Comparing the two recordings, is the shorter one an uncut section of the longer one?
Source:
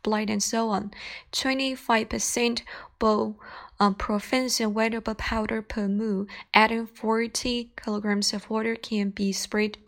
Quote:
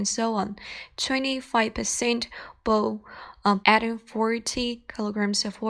no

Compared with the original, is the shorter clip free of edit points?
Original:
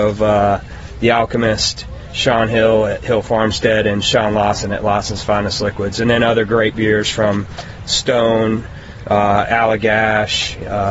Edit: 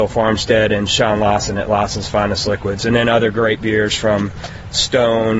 yes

